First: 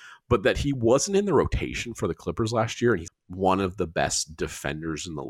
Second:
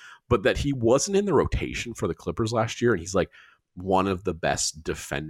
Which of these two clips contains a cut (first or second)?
first